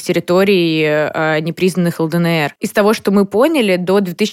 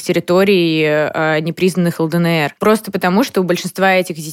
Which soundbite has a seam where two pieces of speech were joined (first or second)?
first